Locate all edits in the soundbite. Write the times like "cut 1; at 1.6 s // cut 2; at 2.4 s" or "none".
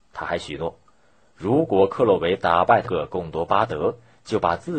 cut 1; at 2.8 s